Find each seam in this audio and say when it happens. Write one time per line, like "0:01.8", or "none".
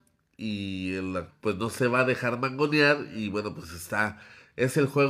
0:01.3